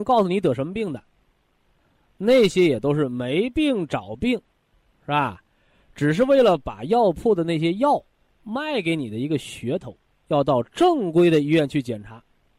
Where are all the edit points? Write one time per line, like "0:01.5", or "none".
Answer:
0:10.3